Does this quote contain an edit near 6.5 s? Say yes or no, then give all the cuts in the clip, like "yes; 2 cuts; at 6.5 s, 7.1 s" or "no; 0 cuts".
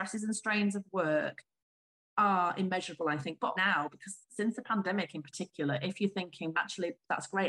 yes; 2 cuts; at 3.5 s, 6.5 s